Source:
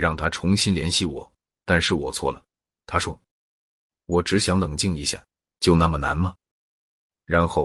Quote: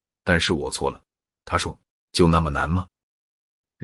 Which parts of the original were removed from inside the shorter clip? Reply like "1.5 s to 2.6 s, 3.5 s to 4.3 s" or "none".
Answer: 3.5 s to 5.5 s